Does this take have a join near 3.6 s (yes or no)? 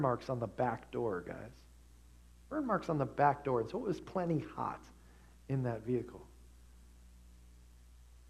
no